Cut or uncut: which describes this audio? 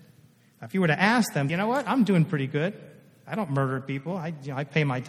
cut